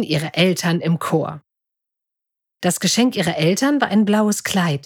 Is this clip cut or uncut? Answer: cut